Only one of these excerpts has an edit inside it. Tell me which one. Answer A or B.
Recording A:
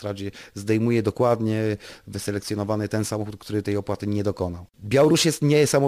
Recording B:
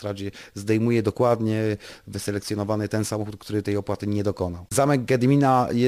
B